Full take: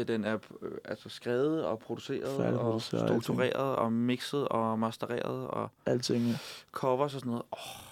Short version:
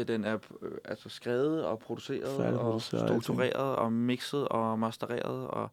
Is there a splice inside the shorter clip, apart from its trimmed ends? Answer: no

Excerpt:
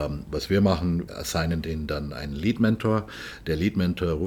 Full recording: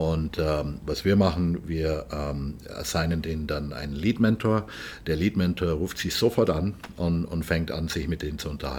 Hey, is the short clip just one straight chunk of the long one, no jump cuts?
no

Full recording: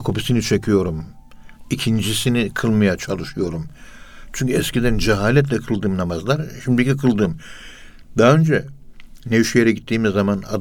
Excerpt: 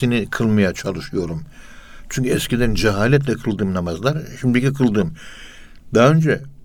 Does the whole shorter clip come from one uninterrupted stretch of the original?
yes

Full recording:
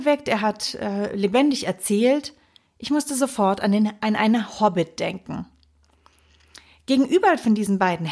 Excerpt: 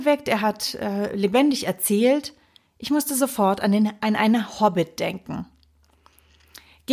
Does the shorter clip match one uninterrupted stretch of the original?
yes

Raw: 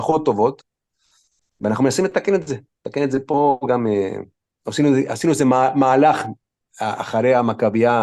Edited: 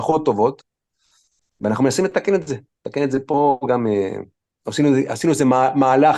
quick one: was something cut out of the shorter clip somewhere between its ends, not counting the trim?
no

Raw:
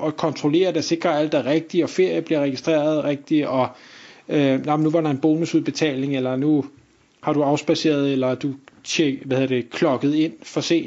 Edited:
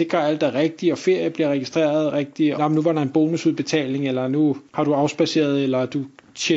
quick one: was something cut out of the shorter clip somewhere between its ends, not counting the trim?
yes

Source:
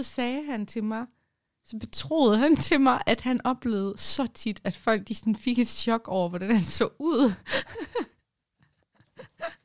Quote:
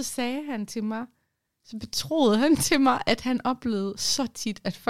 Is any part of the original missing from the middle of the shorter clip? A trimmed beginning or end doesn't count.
no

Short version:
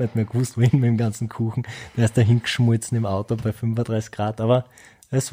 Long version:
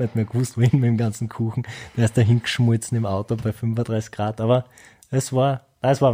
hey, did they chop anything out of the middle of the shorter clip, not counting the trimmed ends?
no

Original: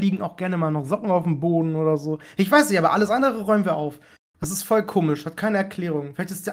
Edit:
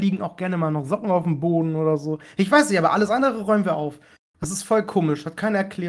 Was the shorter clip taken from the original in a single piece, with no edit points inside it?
yes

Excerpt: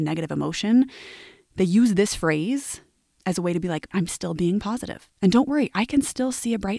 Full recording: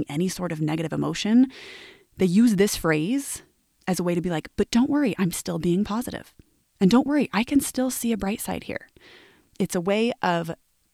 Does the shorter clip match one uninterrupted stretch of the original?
no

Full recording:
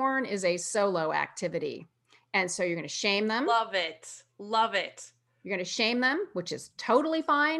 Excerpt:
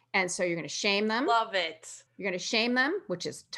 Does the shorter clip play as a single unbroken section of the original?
no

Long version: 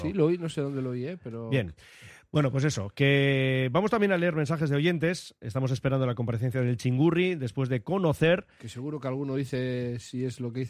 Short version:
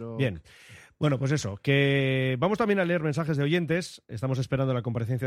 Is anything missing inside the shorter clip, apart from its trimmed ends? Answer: no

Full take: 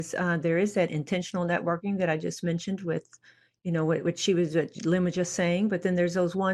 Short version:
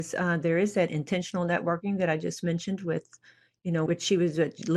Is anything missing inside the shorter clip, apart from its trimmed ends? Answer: yes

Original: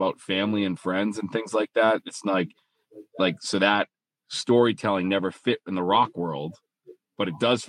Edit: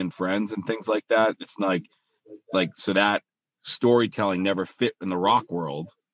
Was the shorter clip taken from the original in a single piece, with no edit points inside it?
yes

